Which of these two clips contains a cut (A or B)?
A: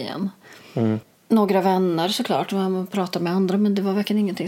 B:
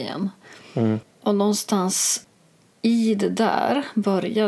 A